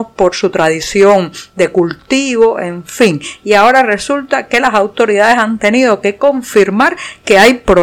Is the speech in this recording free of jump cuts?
yes; 0 cuts

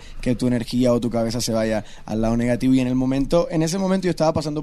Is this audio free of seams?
yes; 0 cuts

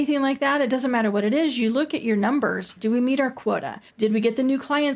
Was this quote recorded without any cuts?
no; 2 cuts; at 2.8 s, 3.9 s

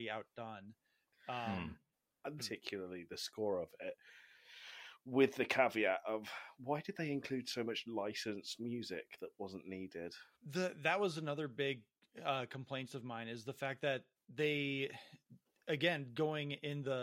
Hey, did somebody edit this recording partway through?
yes; 2 cuts; at 2.4 s, 10.3 s

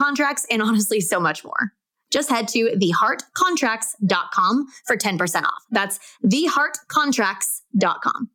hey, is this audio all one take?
yes; 0 cuts

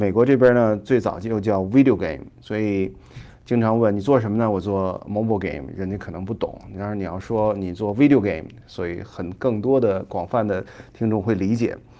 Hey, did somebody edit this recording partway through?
no; 0 cuts

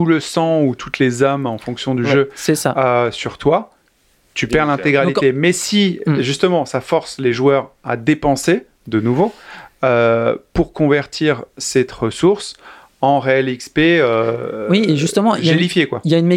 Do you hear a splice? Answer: no; 0 cuts

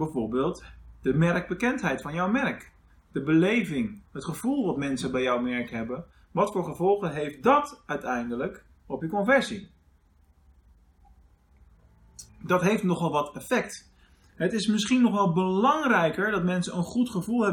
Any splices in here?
yes; 1 cut; at 12.3 s

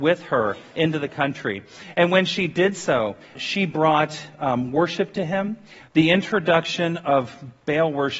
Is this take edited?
yes; 2 cuts; at 3.3 s, 5.8 s

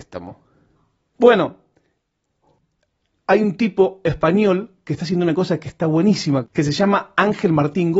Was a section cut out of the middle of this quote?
yes; 1 cut; at 1.1 s

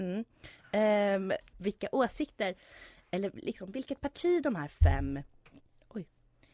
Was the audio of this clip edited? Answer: yes; 1 cut; at 1.5 s

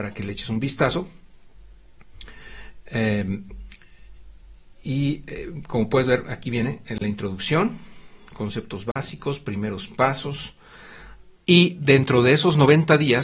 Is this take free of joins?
no; 1 cut; at 11.3 s

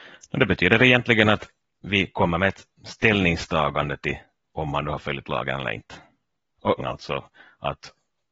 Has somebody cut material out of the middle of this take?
yes; 1 cut; at 6.8 s

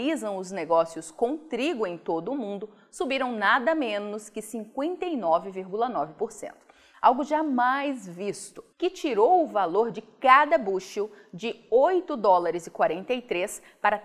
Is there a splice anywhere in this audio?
yes; 2 cuts; at 6.9 s, 8.7 s

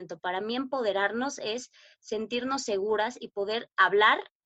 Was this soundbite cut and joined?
no; 0 cuts

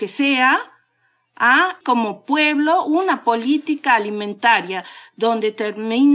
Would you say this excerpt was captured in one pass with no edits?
no; 1 cut; at 1.8 s

